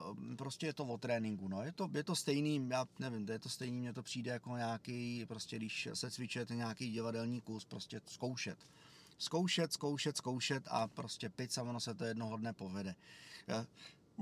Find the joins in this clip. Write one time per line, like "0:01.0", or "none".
none

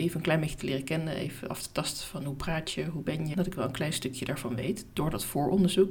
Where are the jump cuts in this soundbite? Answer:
0:03.3

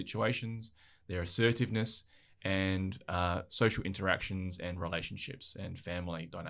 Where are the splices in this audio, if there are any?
none

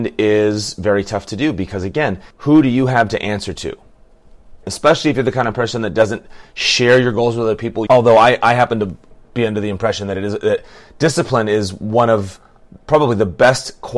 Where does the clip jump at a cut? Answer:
0:02.3
0:04.6
0:07.9

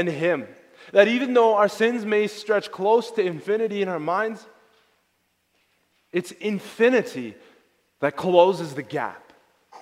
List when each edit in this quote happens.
none

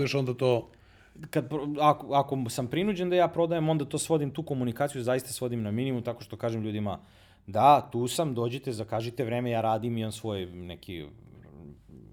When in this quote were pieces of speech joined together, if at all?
none

